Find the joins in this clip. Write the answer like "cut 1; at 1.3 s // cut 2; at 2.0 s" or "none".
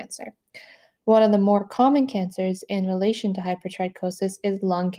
none